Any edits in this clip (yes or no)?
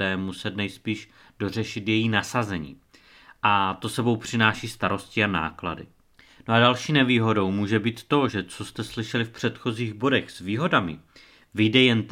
no